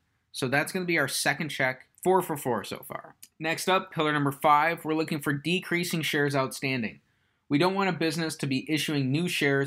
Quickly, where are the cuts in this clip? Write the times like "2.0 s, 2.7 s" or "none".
1.9 s